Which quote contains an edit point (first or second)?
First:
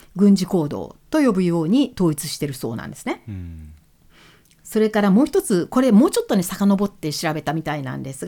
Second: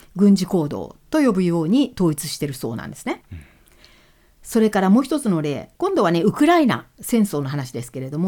second